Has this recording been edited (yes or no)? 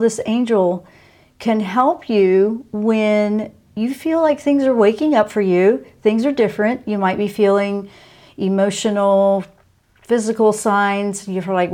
no